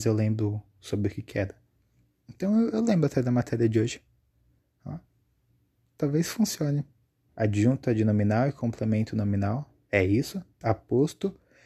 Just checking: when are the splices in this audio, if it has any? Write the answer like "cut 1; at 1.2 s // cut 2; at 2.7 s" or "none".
cut 1; at 7.3 s // cut 2; at 10.6 s